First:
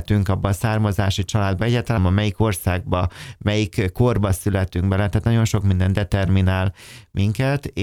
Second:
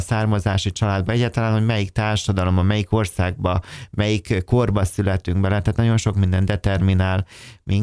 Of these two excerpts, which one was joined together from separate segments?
first; 1 cut; at 2.0 s

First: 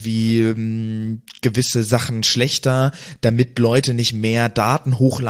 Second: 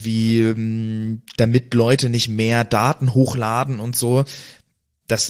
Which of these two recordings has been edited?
second; 1 cut; at 1.3 s

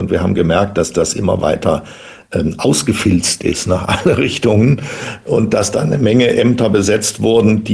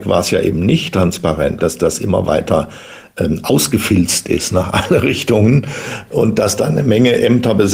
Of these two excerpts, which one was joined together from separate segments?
second; 1 cut; at 1.6 s

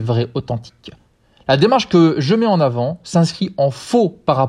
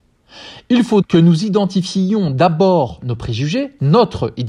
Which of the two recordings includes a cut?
second; 1 cut; at 1.0 s

